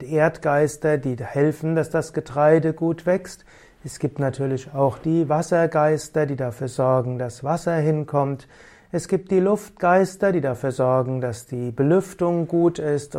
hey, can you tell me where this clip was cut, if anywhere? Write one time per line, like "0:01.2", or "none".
none